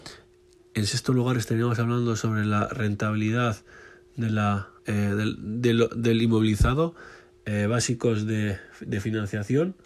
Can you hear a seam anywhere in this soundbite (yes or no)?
yes